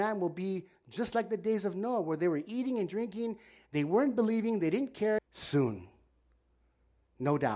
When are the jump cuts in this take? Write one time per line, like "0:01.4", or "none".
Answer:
0:05.2

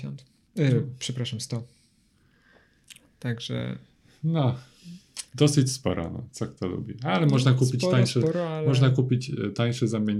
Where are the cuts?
0:05.3

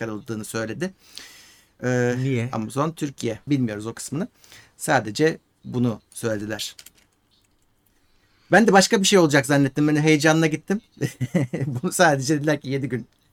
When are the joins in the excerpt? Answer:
0:03.5

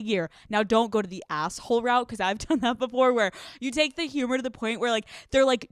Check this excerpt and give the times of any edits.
none

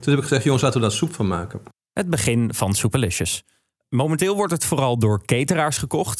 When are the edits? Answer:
none

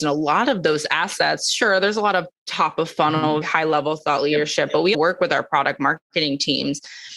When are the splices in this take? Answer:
0:03.4
0:04.9

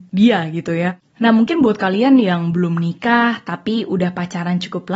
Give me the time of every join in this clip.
0:01.0

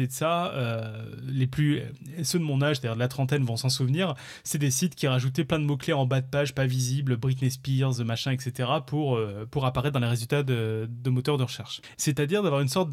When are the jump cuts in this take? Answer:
0:11.9

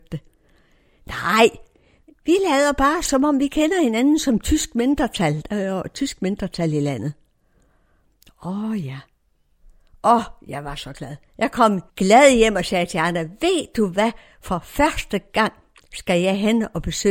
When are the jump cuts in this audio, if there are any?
0:02.0
0:11.9

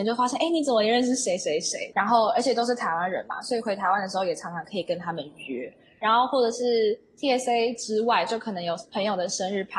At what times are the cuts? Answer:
0:01.9

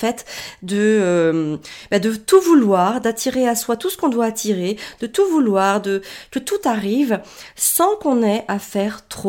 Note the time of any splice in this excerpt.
none

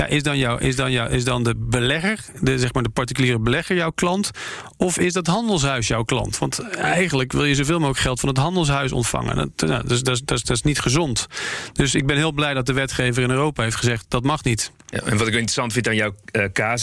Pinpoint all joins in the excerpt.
none

